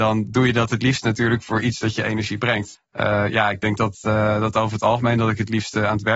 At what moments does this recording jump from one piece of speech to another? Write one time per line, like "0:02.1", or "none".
0:02.8